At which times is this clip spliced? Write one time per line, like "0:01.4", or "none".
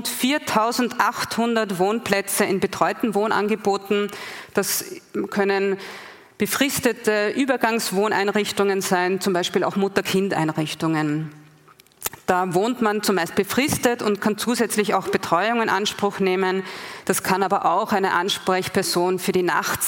0:17.0